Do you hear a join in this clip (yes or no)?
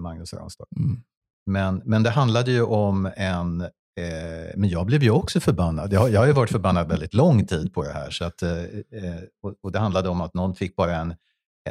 no